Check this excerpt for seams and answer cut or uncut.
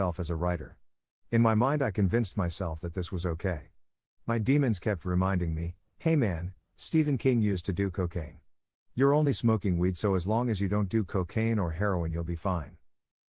uncut